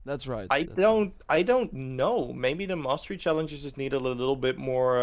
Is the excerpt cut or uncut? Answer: uncut